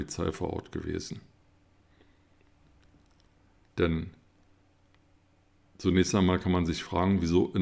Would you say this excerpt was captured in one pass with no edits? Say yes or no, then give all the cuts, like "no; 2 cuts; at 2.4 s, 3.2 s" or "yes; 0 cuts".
no; 1 cut; at 3.7 s